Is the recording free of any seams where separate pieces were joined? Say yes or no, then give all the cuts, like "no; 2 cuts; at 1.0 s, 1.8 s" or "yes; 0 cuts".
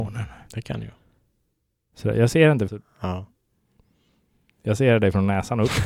no; 1 cut; at 2.7 s